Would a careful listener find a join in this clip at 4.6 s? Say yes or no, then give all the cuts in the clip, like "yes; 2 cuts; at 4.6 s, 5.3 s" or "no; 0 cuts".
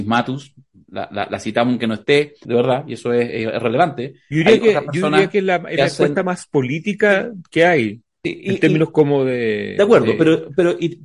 no; 1 cut; at 2.5 s